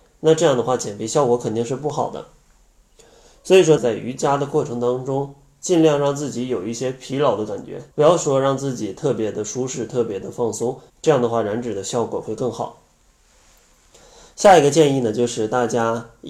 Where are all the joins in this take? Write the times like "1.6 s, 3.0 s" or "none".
3.8 s, 7.9 s, 10.9 s